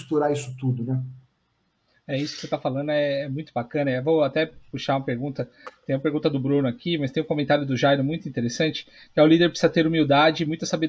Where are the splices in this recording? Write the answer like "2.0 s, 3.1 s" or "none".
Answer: none